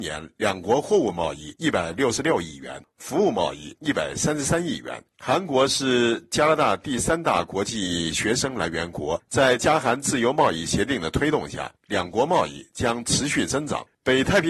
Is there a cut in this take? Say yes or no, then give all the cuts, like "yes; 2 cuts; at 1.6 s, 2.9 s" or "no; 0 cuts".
no; 0 cuts